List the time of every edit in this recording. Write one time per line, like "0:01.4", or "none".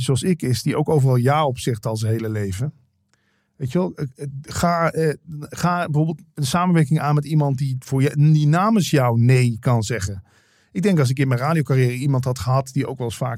none